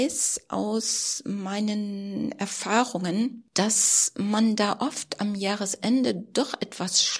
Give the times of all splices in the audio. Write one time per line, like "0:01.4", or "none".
0:03.5